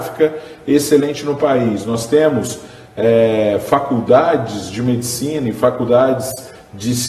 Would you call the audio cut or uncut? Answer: uncut